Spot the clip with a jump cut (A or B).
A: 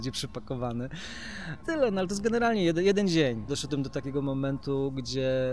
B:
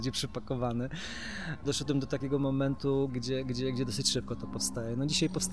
B